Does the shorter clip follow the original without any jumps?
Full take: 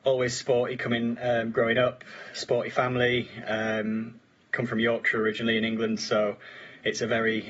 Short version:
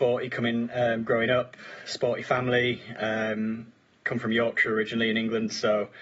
yes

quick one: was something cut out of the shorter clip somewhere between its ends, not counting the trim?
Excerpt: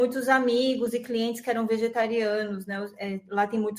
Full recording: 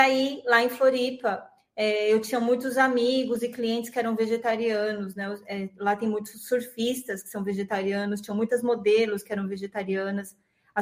no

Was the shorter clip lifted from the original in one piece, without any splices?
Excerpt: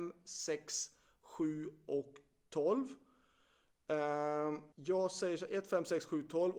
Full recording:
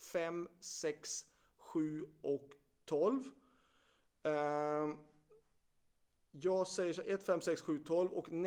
no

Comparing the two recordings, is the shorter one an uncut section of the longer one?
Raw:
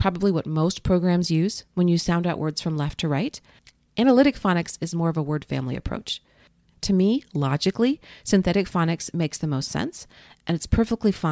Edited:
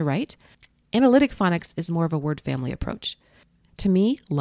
yes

